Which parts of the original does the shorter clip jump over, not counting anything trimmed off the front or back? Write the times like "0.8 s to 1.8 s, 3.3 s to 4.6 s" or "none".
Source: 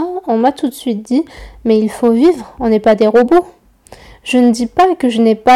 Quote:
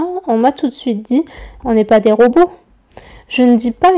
1.6 s to 2.6 s